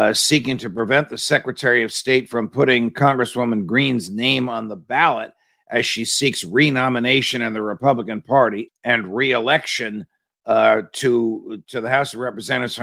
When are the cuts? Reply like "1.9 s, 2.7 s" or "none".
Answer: 8.7 s